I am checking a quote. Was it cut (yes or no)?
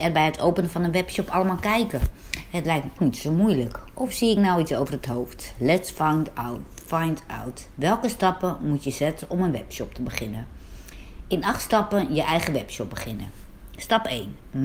yes